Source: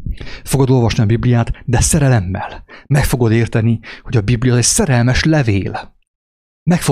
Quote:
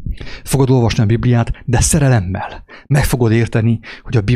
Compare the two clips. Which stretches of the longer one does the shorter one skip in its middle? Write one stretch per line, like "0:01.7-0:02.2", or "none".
none